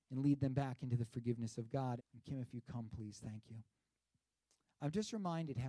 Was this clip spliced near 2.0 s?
yes; 1 cut; at 2.0 s

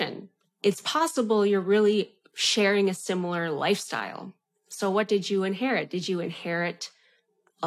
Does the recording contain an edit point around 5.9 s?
no; 0 cuts

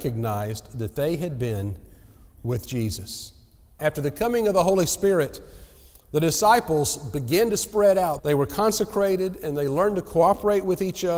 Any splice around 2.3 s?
no; 2 cuts; at 3.8 s, 8.2 s

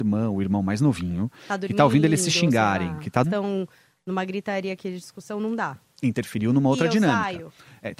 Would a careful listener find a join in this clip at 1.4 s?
no; 1 cut; at 3.2 s

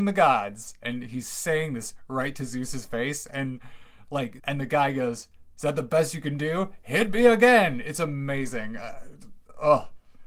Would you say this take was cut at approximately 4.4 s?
yes; 1 cut; at 4.4 s

